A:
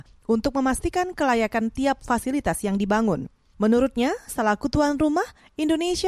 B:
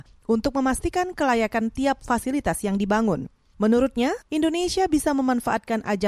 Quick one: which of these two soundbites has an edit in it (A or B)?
B